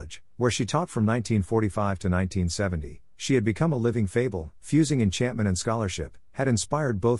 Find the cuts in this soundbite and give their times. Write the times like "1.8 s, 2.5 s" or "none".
4.6 s